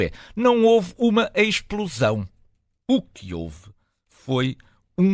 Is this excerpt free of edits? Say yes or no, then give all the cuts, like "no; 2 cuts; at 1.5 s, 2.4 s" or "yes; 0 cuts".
yes; 0 cuts